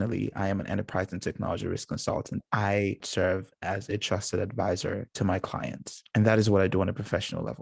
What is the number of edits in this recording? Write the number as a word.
one